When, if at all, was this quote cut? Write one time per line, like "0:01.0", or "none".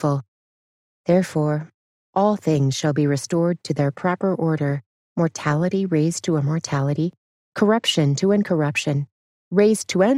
0:05.1